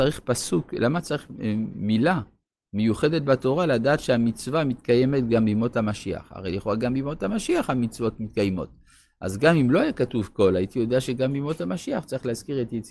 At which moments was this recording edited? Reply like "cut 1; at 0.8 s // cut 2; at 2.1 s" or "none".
none